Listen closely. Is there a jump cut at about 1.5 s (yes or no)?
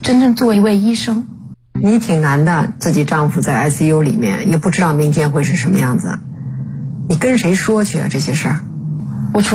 yes